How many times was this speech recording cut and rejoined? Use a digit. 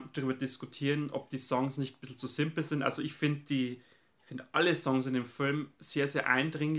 0